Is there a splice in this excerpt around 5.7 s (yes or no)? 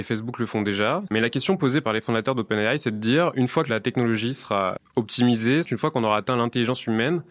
yes